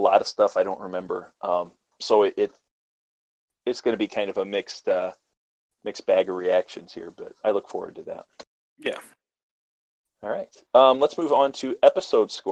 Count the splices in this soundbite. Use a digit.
0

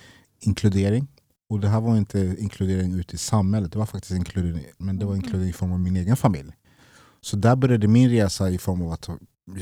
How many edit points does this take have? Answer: 1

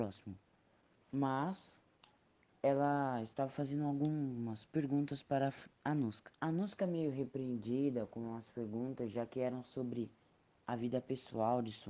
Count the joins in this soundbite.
2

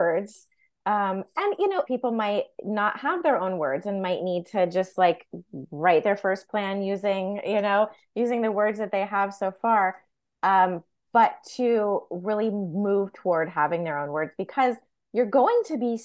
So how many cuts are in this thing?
1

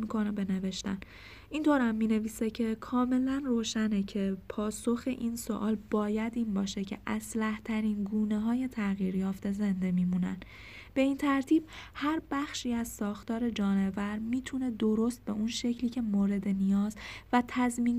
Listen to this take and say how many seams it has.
0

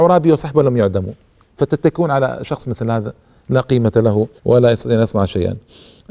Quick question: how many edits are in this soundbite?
1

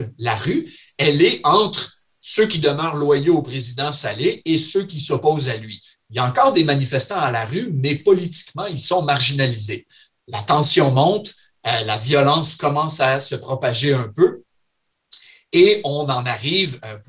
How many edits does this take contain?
0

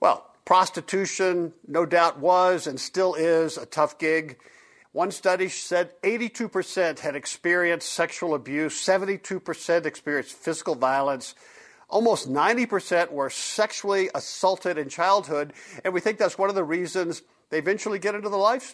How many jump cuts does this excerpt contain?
1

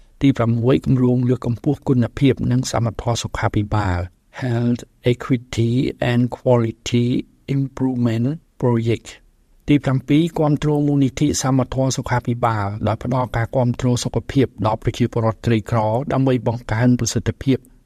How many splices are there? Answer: 0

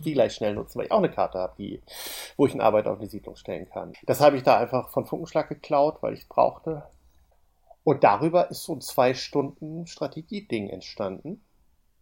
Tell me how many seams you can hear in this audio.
1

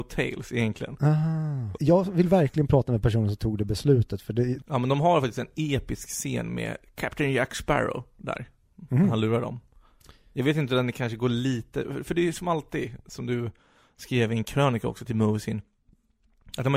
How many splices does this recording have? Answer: 2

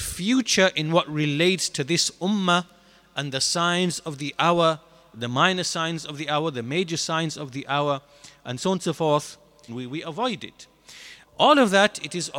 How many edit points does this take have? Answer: 2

